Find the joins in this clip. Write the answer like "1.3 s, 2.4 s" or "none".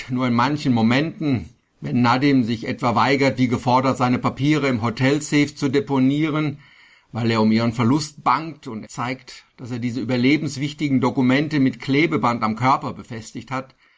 8.8 s